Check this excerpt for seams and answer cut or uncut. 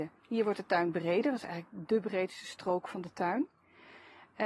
uncut